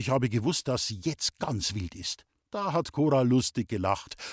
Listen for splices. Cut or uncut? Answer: cut